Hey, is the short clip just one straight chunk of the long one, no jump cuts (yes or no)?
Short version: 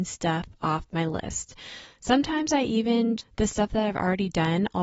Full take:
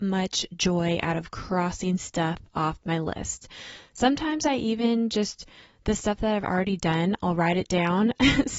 no